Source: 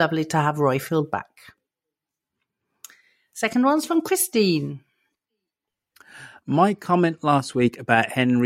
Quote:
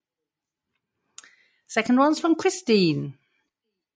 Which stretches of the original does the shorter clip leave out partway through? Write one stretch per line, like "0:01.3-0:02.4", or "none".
none